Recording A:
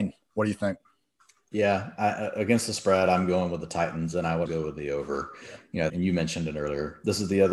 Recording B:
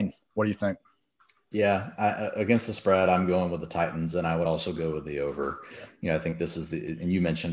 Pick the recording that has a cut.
A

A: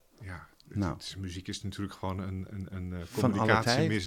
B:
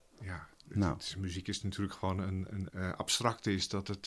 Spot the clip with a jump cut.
B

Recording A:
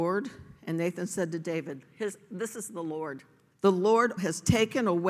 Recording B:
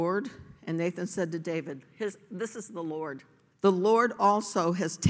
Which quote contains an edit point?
A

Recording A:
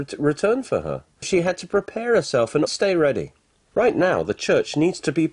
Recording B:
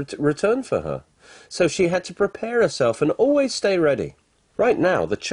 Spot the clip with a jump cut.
A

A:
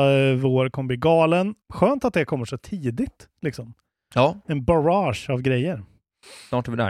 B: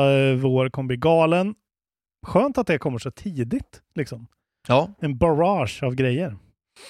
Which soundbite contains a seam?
A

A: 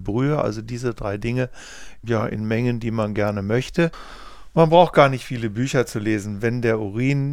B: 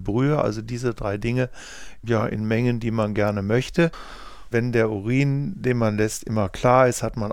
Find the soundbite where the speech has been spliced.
B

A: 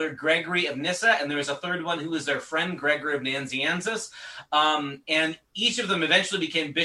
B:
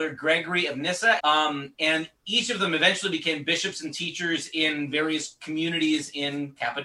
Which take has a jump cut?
B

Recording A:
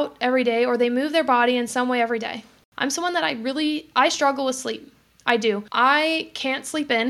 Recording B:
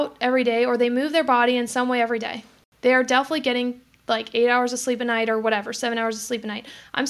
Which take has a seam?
A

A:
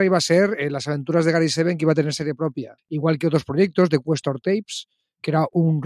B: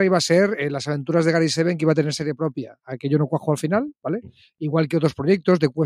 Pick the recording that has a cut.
A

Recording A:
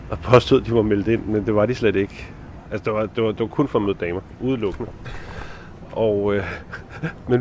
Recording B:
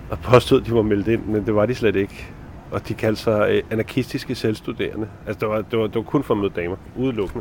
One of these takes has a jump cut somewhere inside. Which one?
A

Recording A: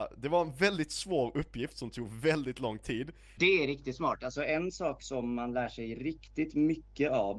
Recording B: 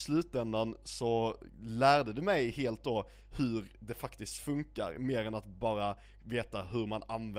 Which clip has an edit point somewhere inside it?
A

